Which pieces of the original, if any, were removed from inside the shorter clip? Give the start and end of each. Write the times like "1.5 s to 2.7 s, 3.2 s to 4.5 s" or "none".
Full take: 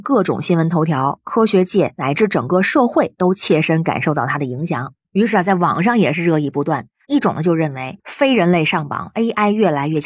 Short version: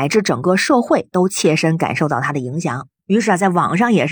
none